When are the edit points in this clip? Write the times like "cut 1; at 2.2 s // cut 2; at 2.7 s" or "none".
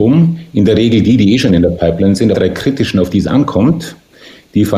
cut 1; at 2.3 s